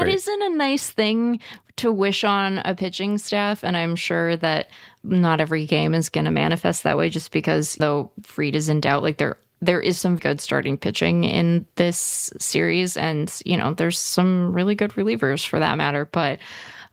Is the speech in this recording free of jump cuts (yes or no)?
no